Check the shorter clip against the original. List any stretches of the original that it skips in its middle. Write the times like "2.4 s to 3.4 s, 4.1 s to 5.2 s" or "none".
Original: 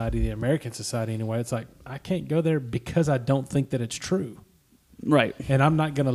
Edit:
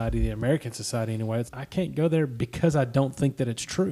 1.5 s to 1.8 s